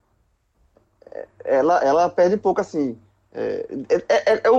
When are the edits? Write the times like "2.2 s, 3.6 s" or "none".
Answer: none